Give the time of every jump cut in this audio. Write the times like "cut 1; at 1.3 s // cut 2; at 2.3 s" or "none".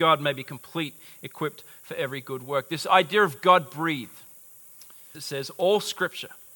cut 1; at 5.1 s